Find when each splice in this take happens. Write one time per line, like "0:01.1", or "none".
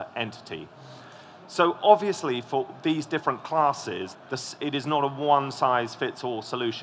0:04.1